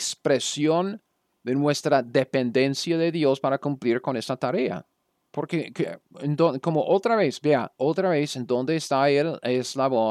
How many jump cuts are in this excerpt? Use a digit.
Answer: 0